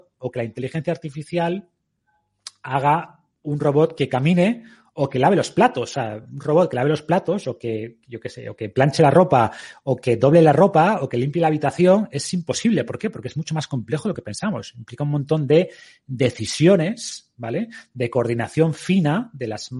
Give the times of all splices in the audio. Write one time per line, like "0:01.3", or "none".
none